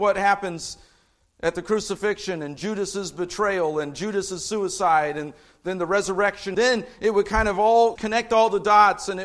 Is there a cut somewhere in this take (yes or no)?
yes